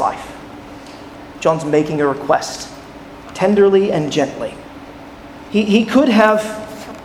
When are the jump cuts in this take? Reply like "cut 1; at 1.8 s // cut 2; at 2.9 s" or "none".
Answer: cut 1; at 1.4 s // cut 2; at 5.5 s